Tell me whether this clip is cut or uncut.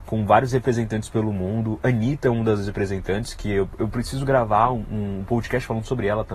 uncut